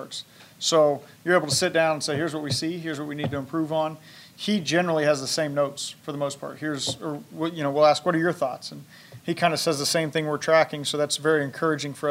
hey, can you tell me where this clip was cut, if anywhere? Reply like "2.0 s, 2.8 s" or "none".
none

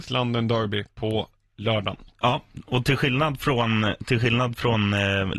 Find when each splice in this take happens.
2.1 s

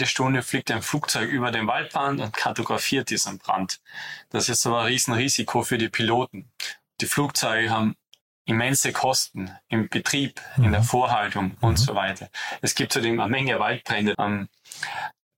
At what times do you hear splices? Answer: 14.1 s

